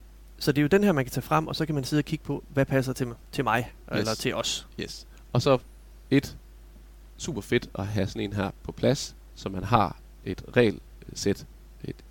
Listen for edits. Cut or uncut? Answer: uncut